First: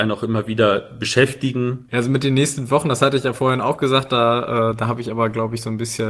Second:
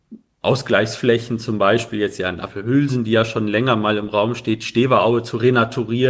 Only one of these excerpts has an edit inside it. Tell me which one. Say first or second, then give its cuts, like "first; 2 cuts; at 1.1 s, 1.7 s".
first; 1 cut; at 1.9 s